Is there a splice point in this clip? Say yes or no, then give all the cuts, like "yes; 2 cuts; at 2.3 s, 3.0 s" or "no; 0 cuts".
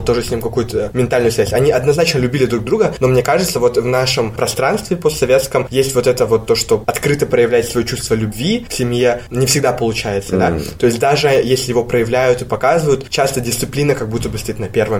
no; 0 cuts